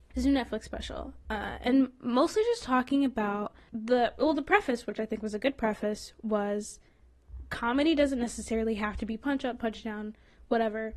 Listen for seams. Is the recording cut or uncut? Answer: uncut